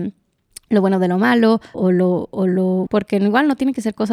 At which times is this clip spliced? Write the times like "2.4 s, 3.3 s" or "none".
1.7 s, 2.9 s